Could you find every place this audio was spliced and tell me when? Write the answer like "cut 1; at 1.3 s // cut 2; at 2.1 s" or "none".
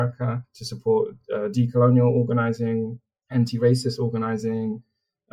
none

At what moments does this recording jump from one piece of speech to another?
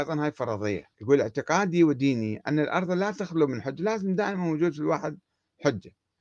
cut 1; at 0.9 s

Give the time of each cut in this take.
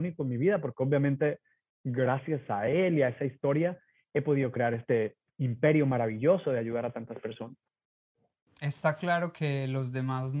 none

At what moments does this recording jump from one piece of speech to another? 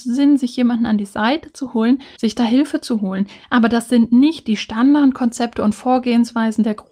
cut 1; at 2.2 s

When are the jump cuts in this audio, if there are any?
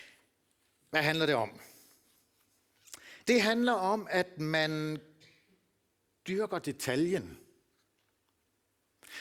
cut 1; at 3.2 s

